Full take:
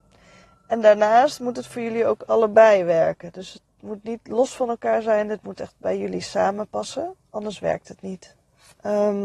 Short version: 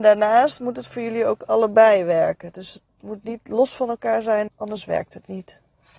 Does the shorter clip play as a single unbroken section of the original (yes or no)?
no